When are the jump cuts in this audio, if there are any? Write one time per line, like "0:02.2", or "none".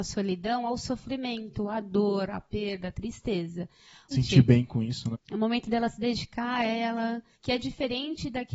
0:04.1
0:05.1
0:07.3